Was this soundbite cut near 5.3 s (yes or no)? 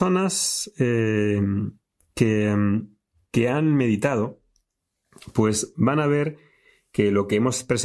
no